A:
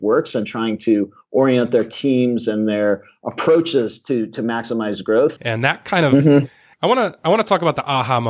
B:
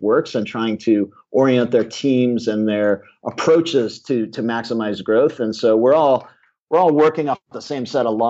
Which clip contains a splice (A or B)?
A